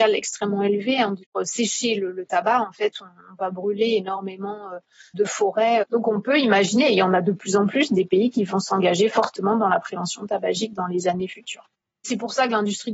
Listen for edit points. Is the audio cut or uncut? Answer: cut